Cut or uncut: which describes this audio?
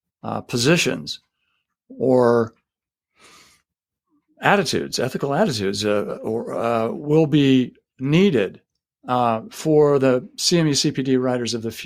uncut